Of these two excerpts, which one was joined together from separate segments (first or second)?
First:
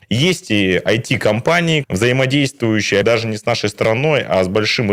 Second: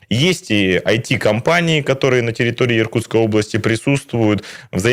first